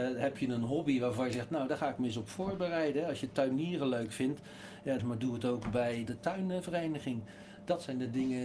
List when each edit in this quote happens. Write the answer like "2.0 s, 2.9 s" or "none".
5.0 s, 6.1 s